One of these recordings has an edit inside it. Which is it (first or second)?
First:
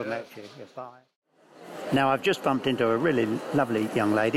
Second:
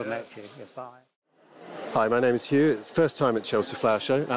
second